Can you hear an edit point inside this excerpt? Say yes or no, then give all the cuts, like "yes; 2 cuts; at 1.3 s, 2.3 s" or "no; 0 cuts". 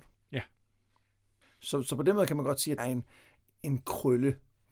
yes; 1 cut; at 2.8 s